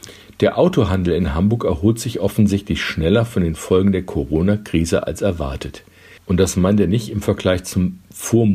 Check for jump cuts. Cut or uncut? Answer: cut